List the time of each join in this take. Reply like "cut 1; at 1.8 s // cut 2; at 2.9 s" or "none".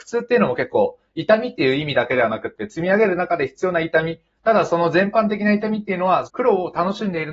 cut 1; at 4.4 s // cut 2; at 6.3 s